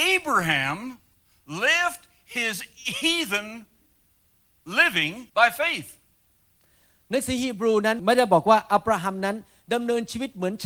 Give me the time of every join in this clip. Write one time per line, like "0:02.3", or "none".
0:05.3